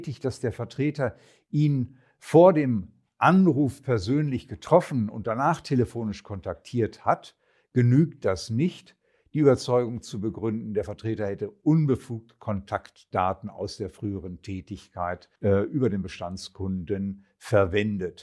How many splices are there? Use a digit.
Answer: 1